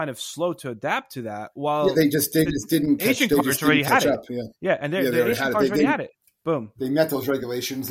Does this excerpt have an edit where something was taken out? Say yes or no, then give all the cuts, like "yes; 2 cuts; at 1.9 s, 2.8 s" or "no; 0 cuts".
no; 0 cuts